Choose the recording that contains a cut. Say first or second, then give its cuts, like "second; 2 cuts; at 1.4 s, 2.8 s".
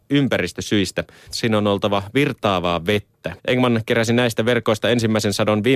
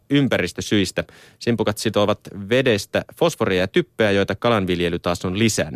first; 2 cuts; at 1.3 s, 3.4 s